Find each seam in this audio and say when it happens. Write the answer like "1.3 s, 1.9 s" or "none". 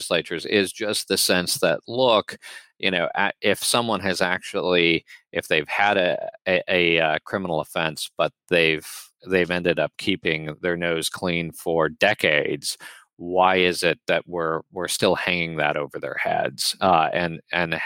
none

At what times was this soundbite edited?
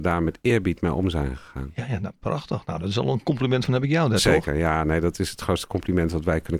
none

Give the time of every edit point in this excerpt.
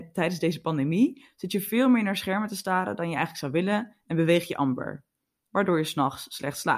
none

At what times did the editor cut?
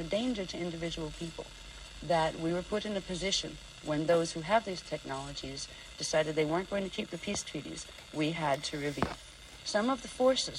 9.6 s

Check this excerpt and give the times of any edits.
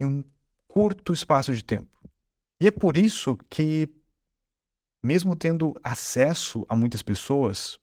2.4 s, 5.0 s

